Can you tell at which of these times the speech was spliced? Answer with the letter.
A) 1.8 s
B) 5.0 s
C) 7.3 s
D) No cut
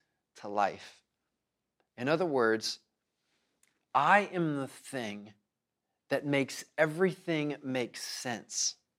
D